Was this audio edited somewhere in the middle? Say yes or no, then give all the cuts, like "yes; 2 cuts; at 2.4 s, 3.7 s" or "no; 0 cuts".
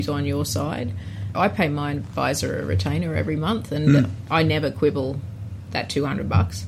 yes; 1 cut; at 1.3 s